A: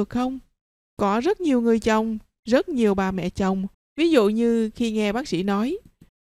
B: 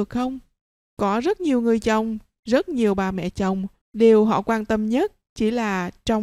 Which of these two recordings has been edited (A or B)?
A